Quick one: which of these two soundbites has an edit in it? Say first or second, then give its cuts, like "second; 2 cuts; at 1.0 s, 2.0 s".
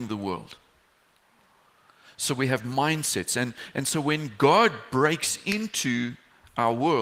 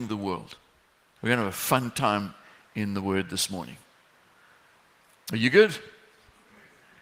second; 1 cut; at 1.2 s